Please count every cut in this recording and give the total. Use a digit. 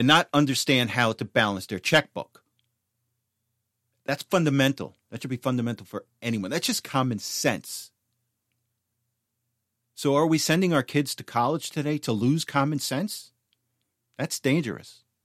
0